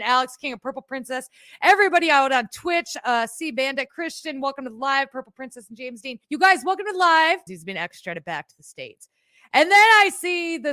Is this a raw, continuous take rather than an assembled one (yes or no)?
no